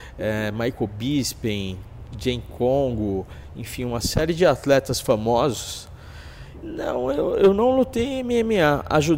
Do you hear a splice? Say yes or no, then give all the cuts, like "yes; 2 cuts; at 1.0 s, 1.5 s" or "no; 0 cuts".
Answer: yes; 1 cut; at 6.6 s